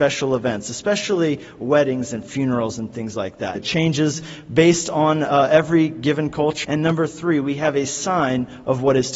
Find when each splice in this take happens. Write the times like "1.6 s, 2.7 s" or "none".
3.5 s, 6.6 s